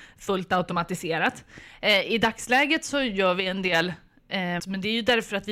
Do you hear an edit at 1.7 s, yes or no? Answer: no